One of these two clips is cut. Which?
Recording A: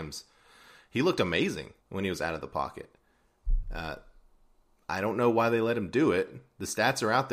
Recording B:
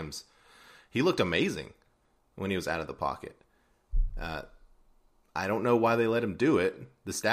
A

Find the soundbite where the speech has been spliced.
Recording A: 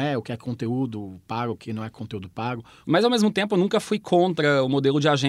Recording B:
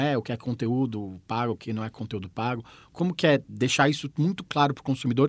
A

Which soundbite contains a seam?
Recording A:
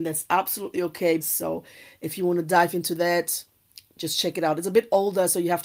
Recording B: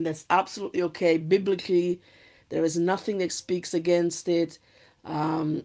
A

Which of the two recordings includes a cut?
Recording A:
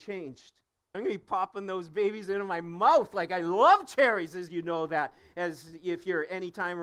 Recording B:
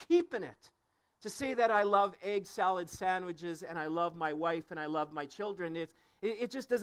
A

